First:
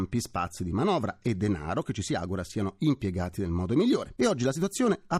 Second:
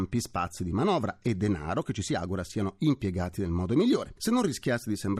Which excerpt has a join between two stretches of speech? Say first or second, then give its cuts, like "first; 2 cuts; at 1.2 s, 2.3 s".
first; 1 cut; at 4.2 s